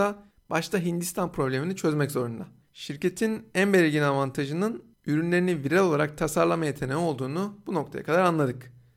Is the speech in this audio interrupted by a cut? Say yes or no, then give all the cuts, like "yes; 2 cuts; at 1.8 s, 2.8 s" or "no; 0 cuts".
yes; 1 cut; at 2.6 s